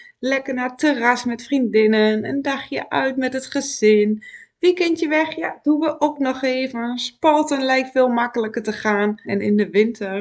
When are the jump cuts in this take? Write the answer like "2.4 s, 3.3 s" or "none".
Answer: 9.2 s